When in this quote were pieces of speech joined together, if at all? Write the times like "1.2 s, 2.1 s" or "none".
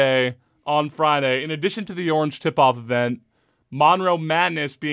none